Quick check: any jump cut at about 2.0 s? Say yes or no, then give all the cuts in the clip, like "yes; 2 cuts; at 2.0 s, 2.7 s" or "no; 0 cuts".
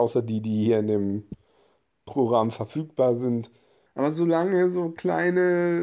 no; 1 cut; at 3.9 s